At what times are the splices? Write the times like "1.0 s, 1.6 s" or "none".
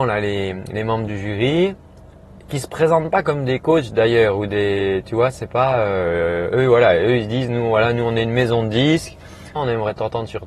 9.6 s